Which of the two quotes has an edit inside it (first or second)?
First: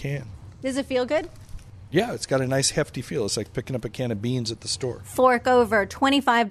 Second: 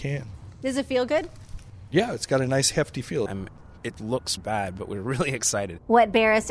second